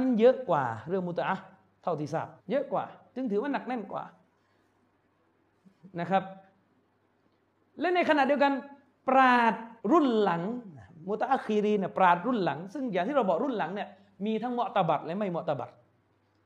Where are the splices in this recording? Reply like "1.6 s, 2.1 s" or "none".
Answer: 2.4 s, 9.8 s